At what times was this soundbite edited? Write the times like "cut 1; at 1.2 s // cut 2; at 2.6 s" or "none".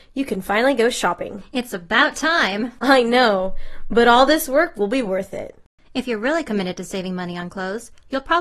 none